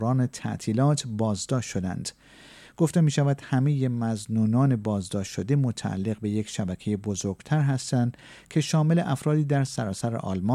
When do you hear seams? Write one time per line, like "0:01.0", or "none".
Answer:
none